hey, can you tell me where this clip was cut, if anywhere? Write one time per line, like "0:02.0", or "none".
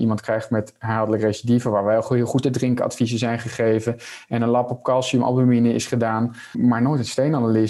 0:06.5